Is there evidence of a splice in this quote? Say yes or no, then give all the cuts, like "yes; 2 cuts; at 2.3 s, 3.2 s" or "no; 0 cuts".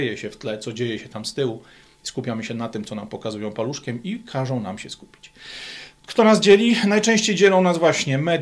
no; 0 cuts